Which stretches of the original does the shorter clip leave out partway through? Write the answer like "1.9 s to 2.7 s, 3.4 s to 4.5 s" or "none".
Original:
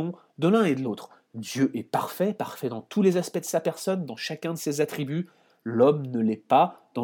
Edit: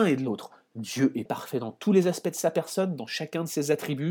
1.8 s to 2.4 s